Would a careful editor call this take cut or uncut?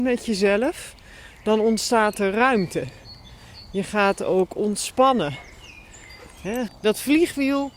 cut